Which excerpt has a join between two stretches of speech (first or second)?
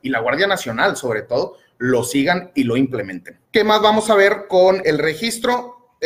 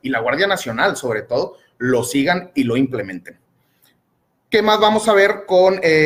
first